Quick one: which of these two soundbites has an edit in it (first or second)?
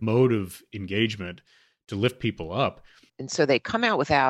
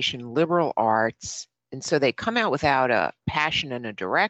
first